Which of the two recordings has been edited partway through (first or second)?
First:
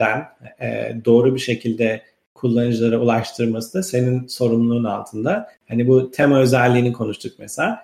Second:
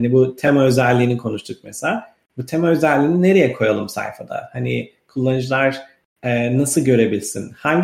first